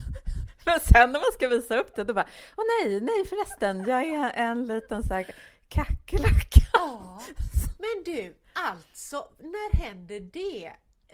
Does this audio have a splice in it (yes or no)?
no